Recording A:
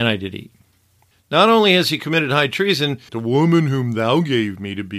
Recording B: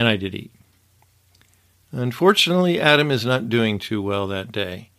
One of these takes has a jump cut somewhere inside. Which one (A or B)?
A